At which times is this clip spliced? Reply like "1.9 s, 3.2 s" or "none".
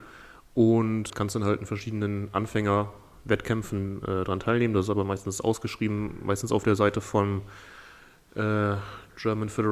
1.1 s